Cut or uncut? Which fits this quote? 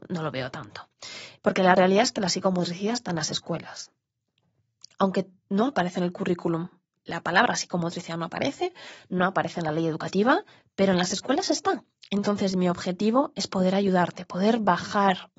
cut